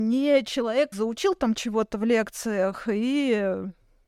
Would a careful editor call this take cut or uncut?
cut